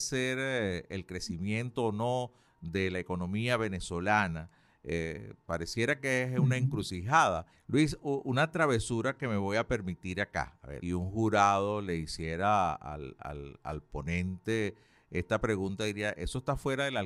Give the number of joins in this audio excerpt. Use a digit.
2